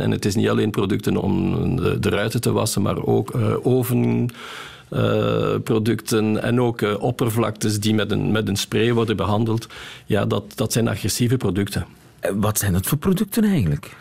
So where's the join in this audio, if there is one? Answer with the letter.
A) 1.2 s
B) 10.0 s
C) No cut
A